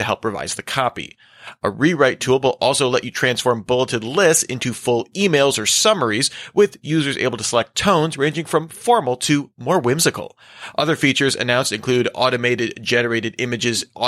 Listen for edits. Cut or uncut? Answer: uncut